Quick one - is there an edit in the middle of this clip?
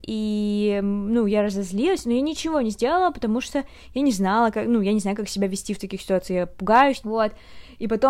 yes; 1 cut; at 7.0 s

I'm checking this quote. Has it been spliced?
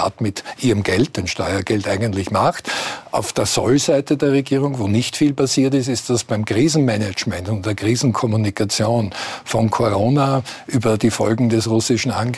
no; 0 cuts

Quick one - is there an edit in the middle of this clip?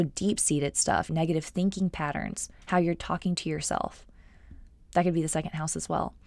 yes; 1 cut; at 1.1 s

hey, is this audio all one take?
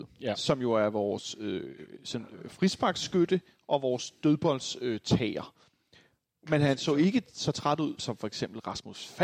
no; 2 cuts; at 6.4 s, 8.0 s

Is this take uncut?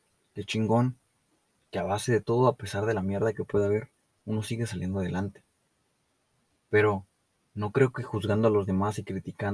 yes; 0 cuts

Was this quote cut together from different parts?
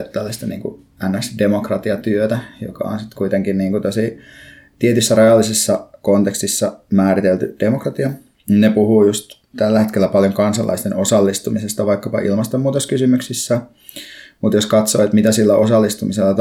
no; 0 cuts

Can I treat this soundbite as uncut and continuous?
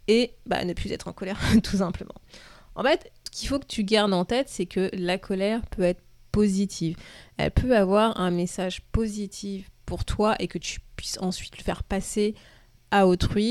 yes; 0 cuts

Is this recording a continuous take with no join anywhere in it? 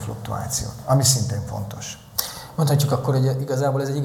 yes; 0 cuts

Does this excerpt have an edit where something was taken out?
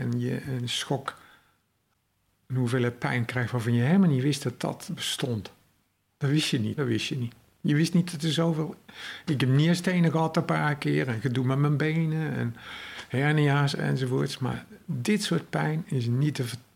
yes; 1 cut; at 6.8 s

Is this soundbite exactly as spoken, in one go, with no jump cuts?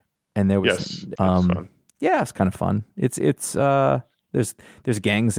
no; 1 cut; at 1.1 s

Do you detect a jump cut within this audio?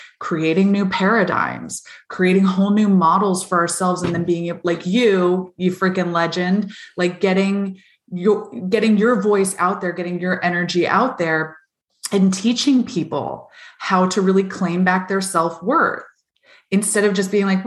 no; 0 cuts

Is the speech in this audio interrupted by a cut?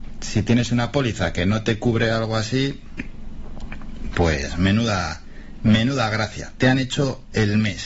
no; 0 cuts

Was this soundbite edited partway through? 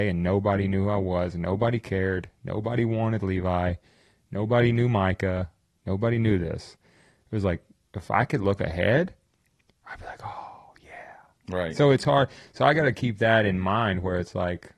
no; 0 cuts

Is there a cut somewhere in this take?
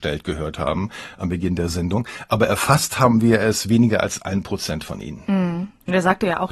no; 0 cuts

